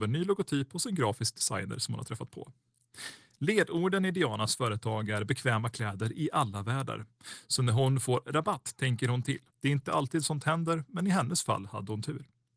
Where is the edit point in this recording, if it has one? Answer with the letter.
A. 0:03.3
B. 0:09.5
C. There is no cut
B